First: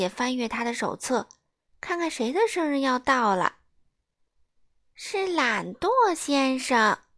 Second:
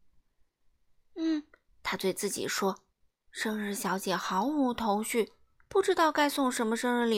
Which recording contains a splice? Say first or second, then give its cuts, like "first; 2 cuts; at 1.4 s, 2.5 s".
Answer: second; 2 cuts; at 1.7 s, 3.1 s